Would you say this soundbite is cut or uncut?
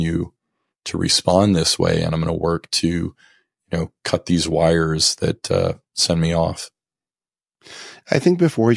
uncut